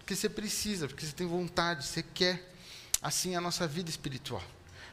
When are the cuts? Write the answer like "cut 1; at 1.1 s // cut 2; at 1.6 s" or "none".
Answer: none